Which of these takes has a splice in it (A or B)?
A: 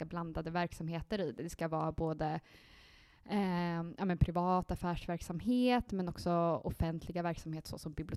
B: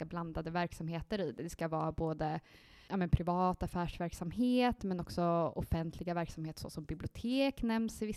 B